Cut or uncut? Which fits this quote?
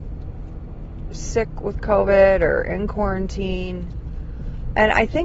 uncut